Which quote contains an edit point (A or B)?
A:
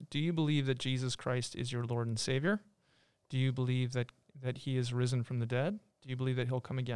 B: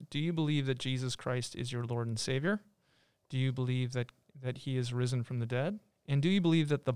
B